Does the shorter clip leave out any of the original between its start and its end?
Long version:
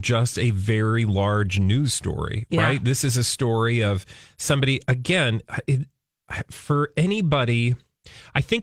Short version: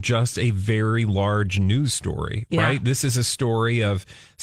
no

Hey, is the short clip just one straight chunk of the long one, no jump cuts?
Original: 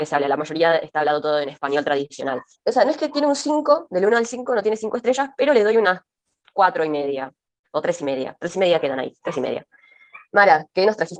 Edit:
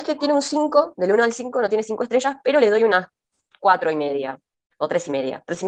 yes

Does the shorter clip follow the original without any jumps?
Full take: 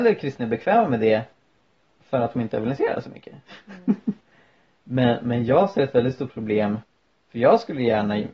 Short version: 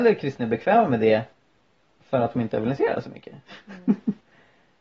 yes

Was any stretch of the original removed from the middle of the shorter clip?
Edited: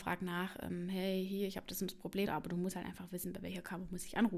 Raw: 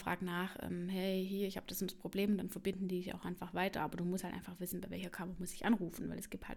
yes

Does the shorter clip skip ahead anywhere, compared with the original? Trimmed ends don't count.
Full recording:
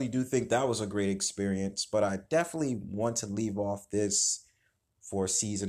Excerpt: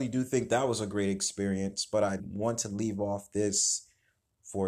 yes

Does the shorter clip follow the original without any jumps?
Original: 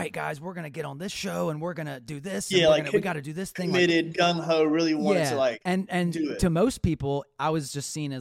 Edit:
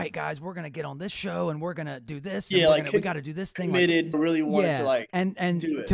no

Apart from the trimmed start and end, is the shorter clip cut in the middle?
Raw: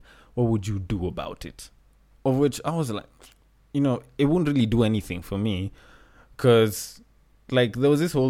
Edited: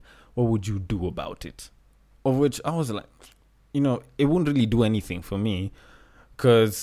no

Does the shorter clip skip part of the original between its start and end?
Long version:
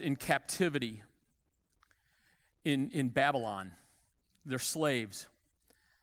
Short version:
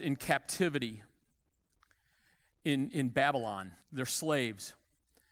yes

